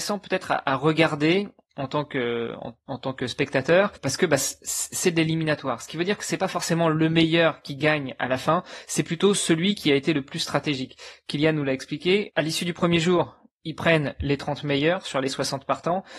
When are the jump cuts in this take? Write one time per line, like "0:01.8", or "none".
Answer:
none